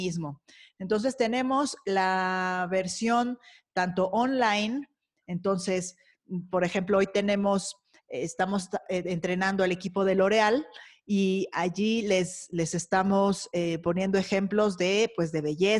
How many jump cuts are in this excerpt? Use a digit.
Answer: 1